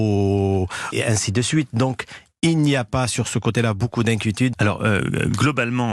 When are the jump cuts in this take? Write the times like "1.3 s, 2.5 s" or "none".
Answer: 0.9 s, 4.5 s